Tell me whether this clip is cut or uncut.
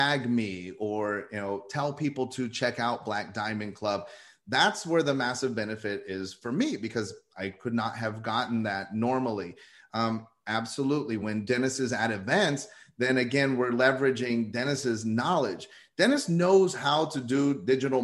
uncut